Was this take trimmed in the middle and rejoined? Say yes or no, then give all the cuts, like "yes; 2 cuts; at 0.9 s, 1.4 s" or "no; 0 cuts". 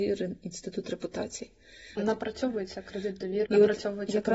yes; 2 cuts; at 2.0 s, 3.5 s